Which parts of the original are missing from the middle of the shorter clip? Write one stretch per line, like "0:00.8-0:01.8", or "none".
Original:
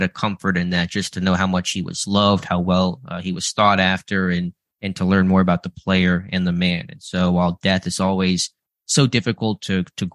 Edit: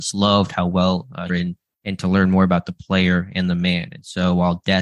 0:03.2-0:04.3